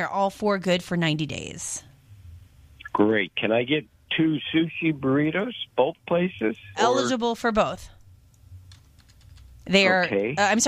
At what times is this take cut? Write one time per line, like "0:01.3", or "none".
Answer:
0:02.9
0:06.7